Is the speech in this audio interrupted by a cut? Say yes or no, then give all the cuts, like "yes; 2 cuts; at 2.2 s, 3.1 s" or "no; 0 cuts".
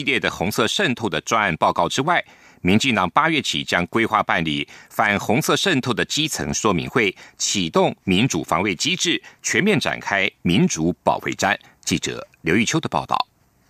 no; 0 cuts